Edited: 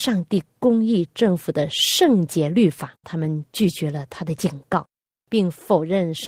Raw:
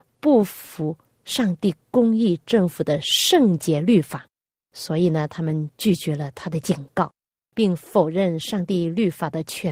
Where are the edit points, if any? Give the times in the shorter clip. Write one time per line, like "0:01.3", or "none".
0:03.0